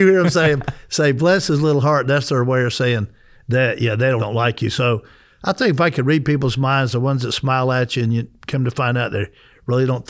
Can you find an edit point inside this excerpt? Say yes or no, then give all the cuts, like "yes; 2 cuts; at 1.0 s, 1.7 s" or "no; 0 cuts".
yes; 1 cut; at 4.2 s